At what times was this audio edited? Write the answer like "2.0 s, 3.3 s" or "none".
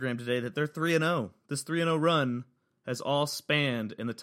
none